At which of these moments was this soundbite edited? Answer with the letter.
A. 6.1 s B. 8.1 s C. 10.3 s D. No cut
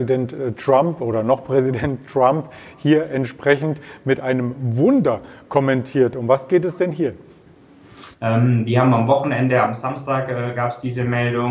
B